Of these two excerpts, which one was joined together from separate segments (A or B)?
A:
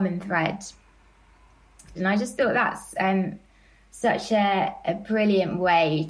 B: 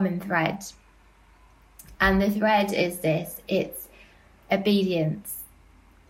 A